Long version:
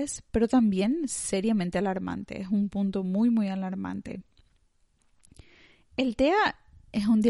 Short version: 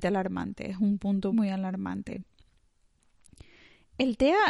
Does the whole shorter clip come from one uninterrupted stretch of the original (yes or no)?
no